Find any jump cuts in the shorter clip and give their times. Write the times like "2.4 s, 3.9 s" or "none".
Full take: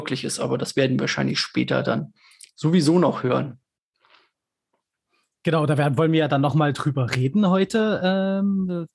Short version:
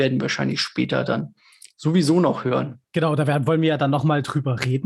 2.9 s